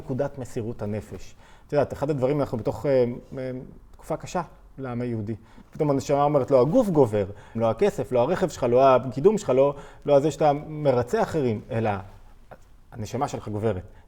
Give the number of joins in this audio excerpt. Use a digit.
2